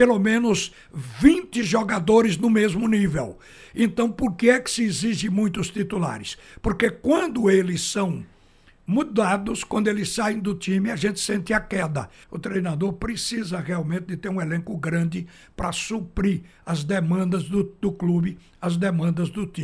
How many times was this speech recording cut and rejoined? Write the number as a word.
one